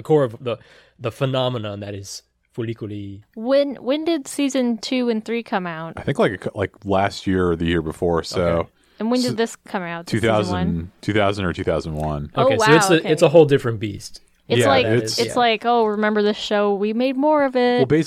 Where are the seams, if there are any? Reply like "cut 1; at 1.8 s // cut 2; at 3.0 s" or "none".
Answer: none